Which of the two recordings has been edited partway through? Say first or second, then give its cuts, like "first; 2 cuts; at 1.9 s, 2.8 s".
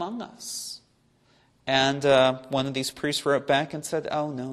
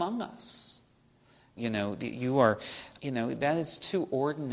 second; 2 cuts; at 1.6 s, 3.0 s